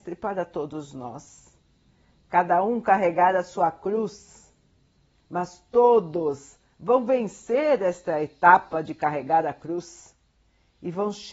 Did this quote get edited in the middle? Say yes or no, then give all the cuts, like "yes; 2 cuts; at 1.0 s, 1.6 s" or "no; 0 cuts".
no; 0 cuts